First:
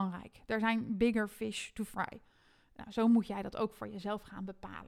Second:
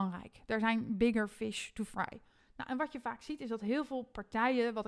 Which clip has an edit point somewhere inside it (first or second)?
second